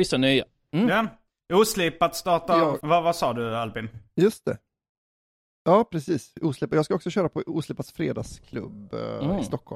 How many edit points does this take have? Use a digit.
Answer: 1